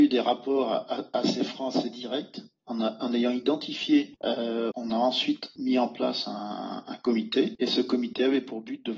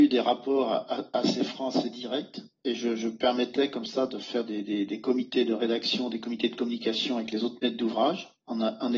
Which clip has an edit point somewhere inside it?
first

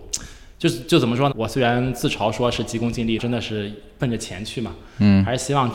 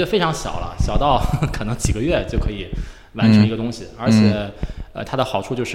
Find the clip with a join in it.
first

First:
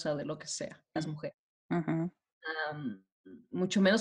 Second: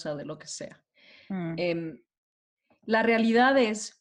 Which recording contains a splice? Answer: first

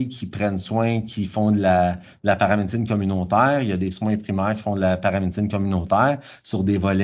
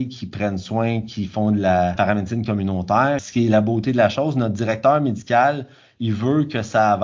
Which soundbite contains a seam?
second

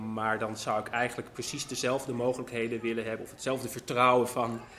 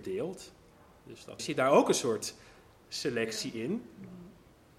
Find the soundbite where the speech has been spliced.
second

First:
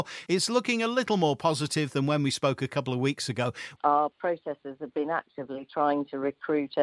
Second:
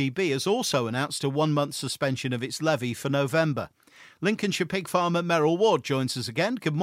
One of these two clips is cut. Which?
first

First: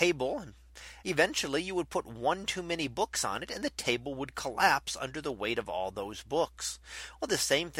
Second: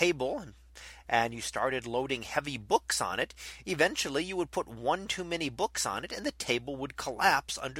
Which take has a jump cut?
first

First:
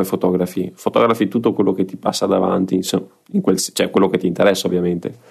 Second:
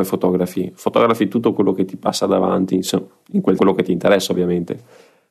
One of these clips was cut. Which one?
second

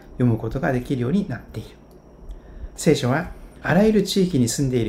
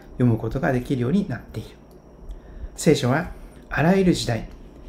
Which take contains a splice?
first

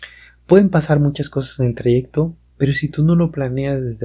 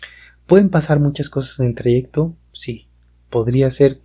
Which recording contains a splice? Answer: first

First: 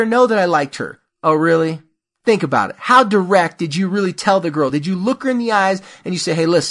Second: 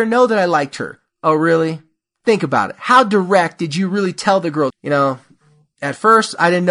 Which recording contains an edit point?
second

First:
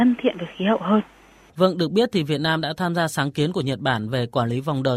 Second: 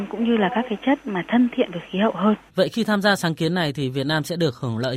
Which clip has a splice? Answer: second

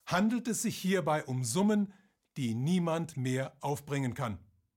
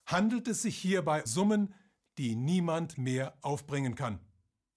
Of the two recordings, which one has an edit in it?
second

